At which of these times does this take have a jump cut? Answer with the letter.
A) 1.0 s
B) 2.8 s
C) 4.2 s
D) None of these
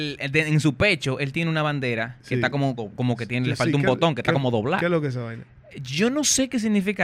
B